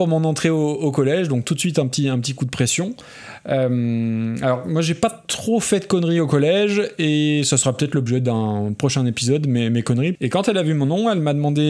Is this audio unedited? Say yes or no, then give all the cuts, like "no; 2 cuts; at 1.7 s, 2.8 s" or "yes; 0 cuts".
no; 1 cut; at 10.2 s